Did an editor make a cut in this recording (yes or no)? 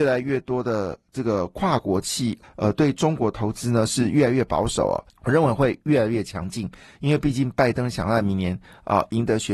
yes